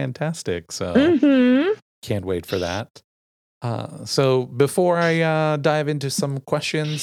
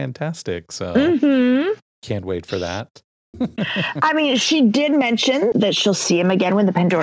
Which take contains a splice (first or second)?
second